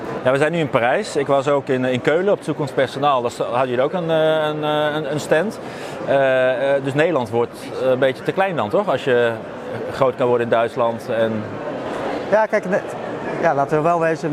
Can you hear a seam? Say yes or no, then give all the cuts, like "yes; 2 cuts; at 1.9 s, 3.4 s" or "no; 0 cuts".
no; 0 cuts